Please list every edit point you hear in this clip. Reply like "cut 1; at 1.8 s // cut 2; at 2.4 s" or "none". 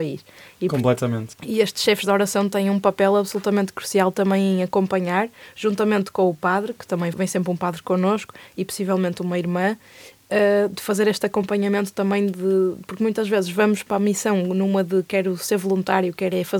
cut 1; at 1.3 s // cut 2; at 7.1 s